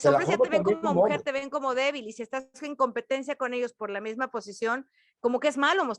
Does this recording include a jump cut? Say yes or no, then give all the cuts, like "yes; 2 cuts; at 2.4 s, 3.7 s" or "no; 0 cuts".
no; 0 cuts